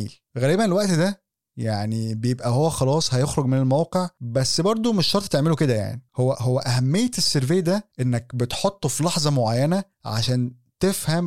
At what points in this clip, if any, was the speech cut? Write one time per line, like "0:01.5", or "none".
0:06.3
0:09.9